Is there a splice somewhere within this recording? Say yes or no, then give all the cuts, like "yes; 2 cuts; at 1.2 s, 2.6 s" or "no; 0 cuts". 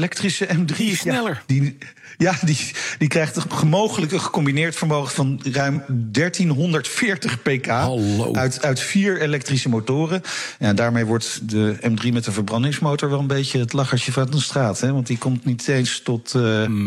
no; 0 cuts